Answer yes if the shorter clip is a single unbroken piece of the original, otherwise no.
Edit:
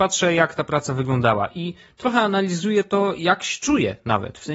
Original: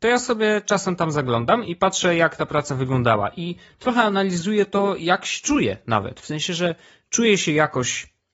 yes